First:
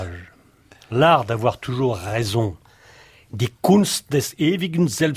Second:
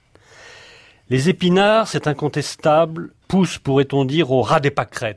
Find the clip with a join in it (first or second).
second